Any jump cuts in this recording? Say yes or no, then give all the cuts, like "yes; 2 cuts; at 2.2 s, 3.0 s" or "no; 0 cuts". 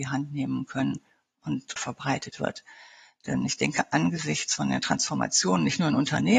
yes; 1 cut; at 1.8 s